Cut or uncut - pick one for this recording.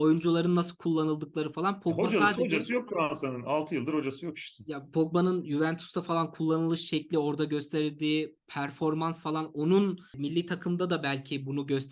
uncut